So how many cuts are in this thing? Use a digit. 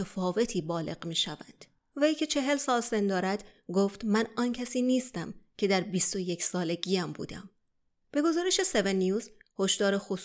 1